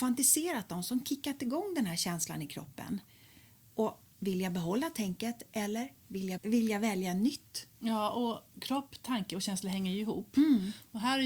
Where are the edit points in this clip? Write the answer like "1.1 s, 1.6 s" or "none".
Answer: 6.4 s